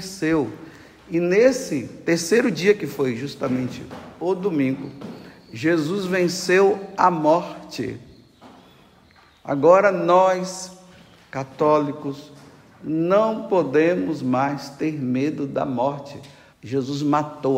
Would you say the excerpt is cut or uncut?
cut